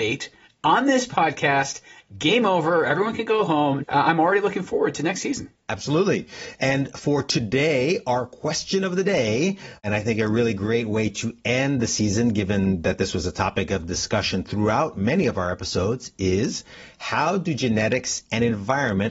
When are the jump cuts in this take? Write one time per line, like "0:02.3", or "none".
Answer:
0:03.8

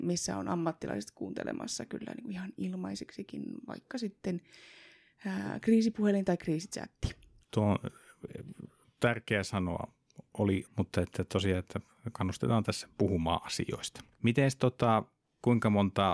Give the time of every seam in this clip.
0:07.4
0:10.6
0:14.1

